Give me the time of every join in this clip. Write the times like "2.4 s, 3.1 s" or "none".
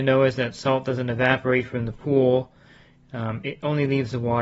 none